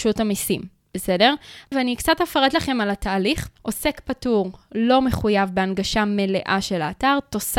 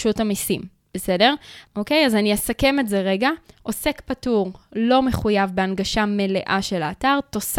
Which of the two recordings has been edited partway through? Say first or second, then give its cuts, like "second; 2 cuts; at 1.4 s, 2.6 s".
first; 2 cuts; at 1.7 s, 3.6 s